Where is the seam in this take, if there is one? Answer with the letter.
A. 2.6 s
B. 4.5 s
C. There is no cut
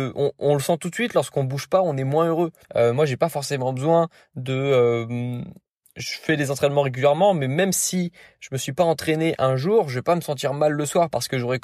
A